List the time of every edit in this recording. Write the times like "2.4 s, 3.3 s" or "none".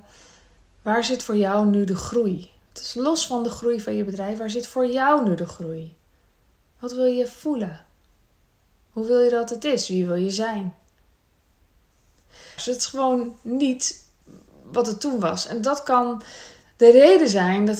12.6 s